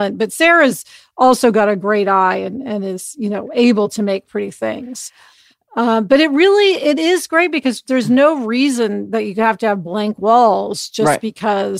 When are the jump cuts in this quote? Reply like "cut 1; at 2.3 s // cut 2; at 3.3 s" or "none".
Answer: none